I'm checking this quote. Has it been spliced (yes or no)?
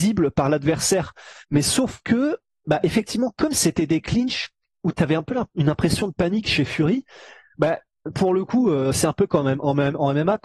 yes